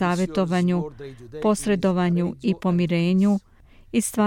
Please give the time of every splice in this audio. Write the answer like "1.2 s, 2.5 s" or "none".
none